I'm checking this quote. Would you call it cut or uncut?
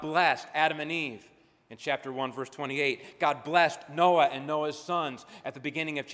uncut